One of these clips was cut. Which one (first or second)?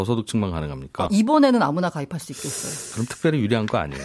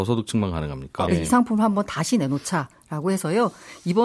second